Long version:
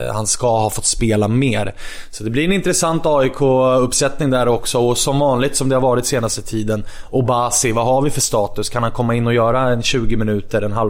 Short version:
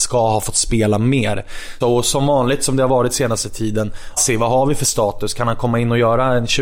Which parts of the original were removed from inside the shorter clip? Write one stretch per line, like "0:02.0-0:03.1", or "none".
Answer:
0:02.1-0:04.7
0:07.1-0:07.5